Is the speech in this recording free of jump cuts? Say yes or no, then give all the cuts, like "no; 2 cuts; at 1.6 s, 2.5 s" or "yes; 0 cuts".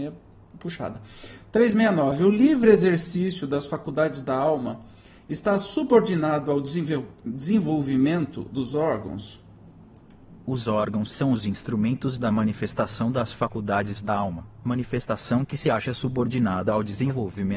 yes; 0 cuts